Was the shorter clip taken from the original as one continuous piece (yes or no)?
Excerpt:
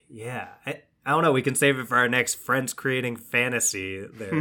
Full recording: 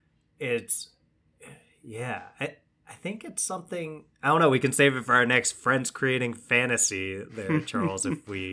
no